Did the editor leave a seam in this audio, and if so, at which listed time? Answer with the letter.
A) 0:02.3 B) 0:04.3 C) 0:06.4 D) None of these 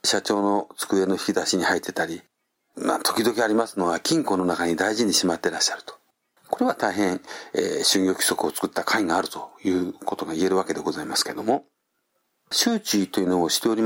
C